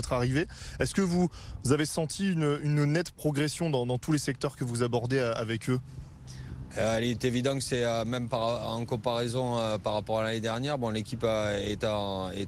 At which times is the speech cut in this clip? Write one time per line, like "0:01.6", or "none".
none